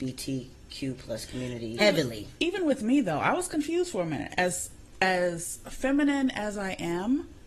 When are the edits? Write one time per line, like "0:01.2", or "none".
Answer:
0:01.8

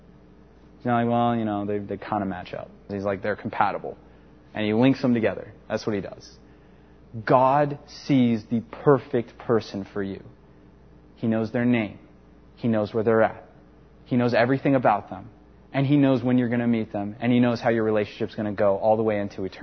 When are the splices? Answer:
0:02.9

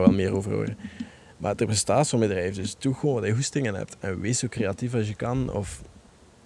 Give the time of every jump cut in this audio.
none

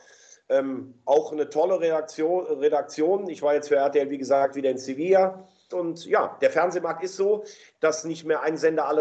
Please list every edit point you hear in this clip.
0:05.7

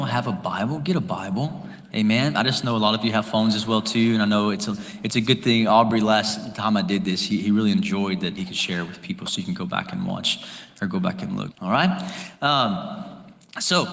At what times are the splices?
0:08.4
0:11.5

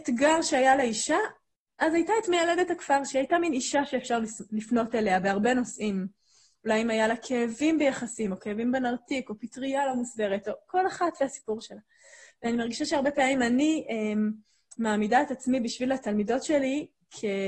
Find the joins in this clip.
none

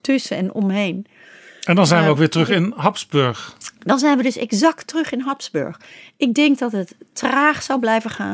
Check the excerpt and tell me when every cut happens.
none

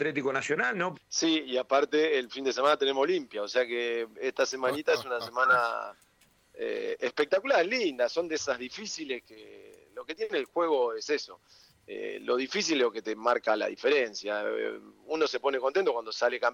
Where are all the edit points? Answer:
0:00.9

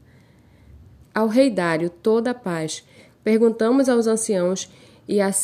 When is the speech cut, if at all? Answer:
0:01.0
0:03.1

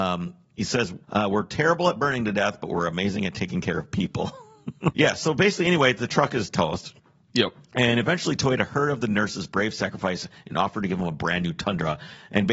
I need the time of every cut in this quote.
0:01.0
0:04.9

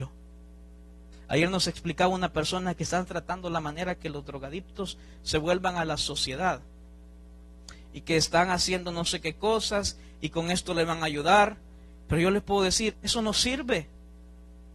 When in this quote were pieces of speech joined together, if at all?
0:01.1
0:12.9

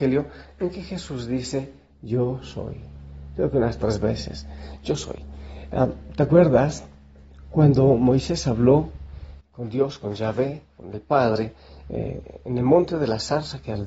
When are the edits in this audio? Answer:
0:09.4
0:11.9

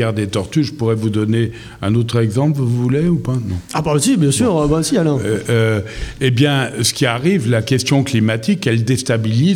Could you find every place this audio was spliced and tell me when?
none

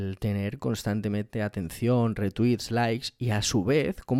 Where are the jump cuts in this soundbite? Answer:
none

